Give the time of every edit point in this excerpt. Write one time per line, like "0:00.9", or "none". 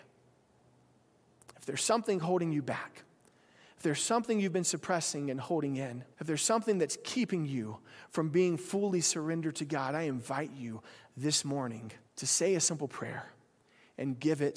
0:06.1
0:12.1